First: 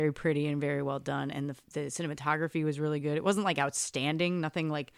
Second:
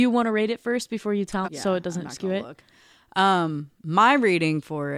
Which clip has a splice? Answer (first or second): second